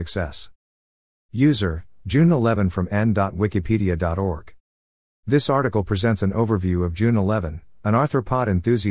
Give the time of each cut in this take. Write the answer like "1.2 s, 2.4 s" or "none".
1.1 s